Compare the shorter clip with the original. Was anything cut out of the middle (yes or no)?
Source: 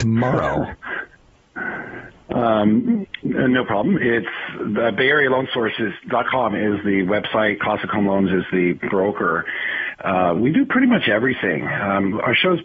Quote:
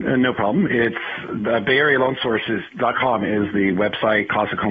no